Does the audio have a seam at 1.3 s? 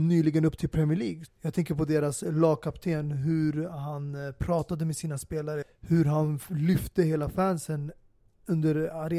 yes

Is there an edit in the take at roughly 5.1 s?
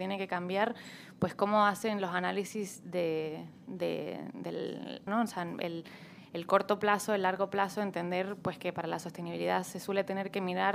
yes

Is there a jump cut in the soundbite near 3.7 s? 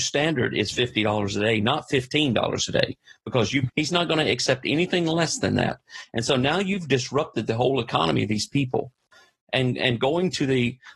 yes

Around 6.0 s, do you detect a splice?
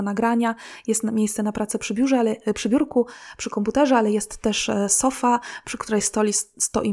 no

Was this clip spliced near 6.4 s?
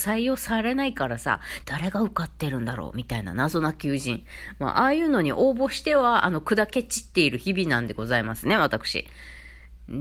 no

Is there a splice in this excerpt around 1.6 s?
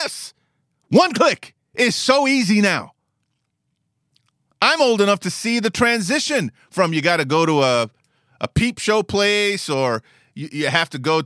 yes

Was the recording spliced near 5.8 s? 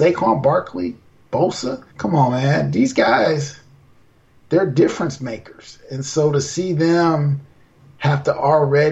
no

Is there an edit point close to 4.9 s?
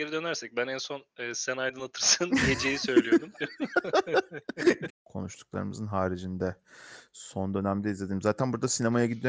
yes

